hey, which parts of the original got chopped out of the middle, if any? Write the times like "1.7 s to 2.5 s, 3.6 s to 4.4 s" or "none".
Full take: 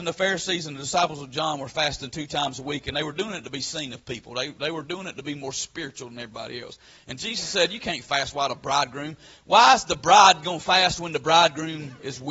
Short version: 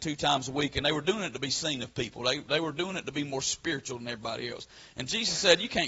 none